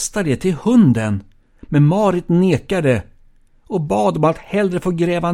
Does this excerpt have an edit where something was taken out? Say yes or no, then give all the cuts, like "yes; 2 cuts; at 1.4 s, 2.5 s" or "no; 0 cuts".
no; 0 cuts